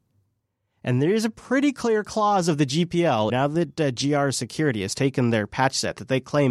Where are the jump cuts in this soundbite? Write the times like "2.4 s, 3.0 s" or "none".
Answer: 3.3 s